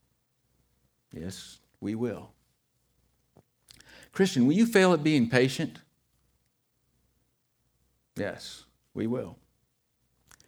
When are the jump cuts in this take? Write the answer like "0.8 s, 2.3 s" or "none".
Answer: none